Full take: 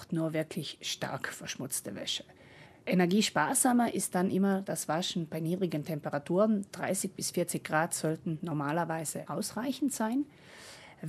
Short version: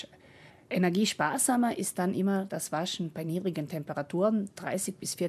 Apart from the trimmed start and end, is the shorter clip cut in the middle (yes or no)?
no